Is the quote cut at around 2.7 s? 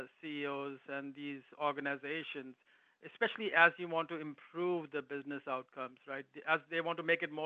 no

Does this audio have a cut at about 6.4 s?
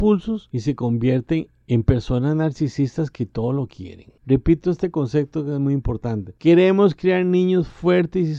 yes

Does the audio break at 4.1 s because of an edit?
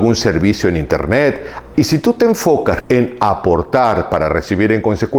no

